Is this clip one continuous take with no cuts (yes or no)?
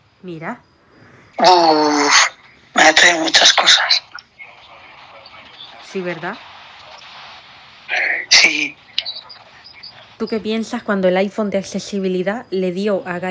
no